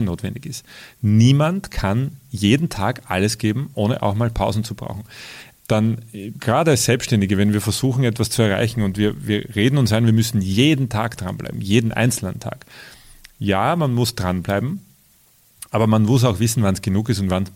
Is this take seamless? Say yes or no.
no